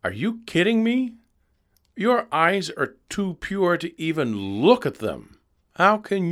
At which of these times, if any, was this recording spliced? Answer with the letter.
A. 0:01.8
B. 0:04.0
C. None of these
C